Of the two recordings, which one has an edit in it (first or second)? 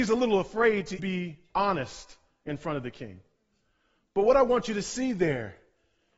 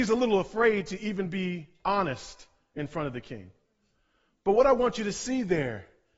first